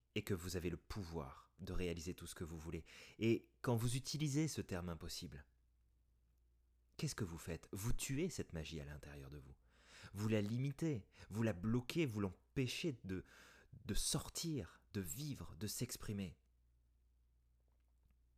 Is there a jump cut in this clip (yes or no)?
no